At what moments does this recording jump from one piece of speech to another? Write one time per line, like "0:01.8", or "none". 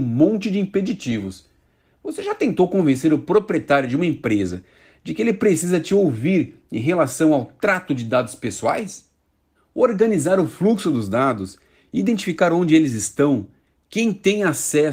0:09.5